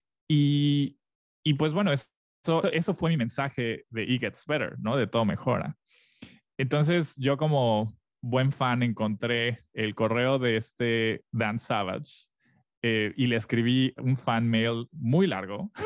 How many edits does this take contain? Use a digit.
1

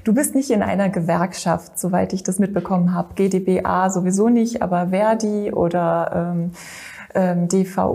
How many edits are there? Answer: 0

